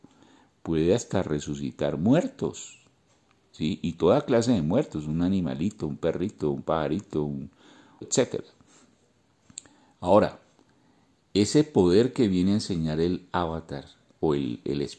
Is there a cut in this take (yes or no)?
yes